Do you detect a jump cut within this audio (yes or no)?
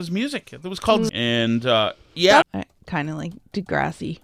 yes